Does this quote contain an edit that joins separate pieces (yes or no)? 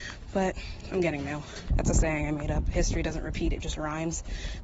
yes